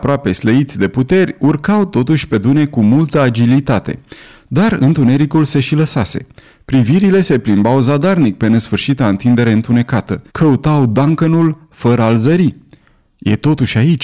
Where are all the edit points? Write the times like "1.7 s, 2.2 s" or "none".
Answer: 10.3 s